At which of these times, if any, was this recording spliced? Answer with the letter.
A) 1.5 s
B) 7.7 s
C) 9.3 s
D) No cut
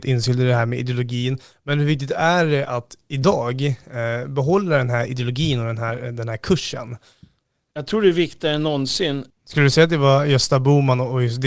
C